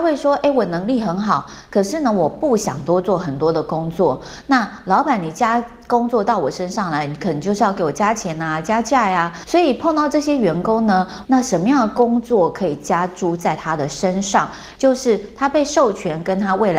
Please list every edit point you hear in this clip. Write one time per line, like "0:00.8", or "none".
0:09.4
0:11.2
0:14.8